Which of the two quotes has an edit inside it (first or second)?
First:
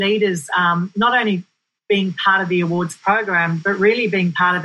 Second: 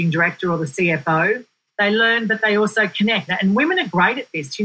second